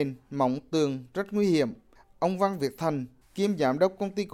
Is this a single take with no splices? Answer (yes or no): no